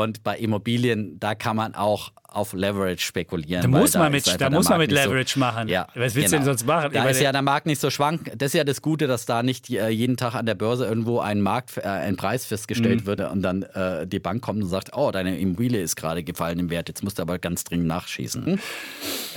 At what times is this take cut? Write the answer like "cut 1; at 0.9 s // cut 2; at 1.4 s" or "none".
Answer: cut 1; at 13.2 s // cut 2; at 18.5 s